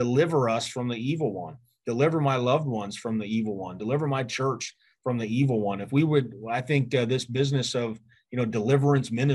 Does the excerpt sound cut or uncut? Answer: cut